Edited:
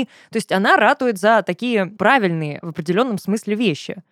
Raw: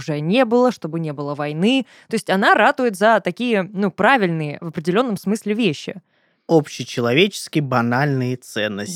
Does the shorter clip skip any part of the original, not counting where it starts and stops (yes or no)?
yes